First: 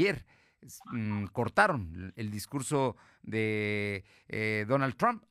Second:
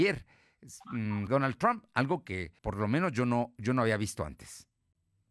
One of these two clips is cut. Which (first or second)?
second